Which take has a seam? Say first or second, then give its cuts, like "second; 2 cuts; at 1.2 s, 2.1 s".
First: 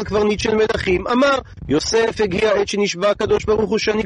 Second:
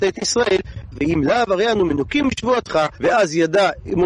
second; 2 cuts; at 0.9 s, 3.0 s